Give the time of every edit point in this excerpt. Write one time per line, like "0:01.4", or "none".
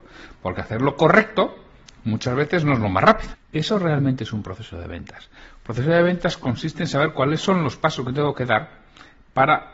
0:03.3